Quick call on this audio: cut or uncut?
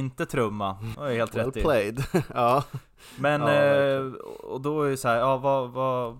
cut